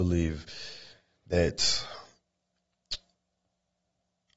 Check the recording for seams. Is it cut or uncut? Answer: uncut